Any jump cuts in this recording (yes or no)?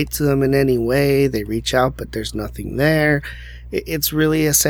no